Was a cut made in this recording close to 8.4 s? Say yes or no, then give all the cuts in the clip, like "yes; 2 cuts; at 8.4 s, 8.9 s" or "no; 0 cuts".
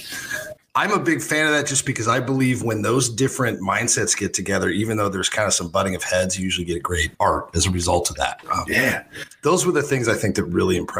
yes; 2 cuts; at 7.1 s, 8.4 s